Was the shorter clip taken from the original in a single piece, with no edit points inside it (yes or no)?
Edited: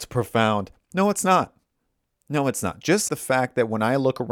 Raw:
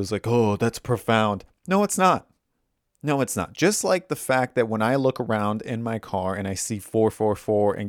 no